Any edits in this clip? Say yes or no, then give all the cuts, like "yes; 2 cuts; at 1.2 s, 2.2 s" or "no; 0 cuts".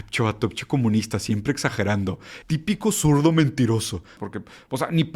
yes; 2 cuts; at 2.4 s, 4.2 s